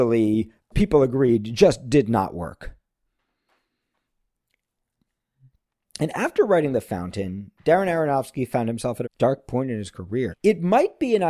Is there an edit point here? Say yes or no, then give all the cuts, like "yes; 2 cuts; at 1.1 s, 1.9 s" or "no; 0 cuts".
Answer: yes; 2 cuts; at 9.0 s, 10.3 s